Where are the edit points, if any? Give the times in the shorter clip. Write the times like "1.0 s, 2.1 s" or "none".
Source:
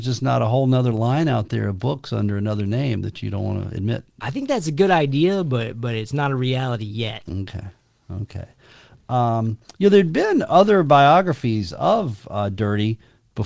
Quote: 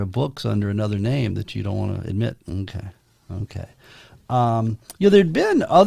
2.4 s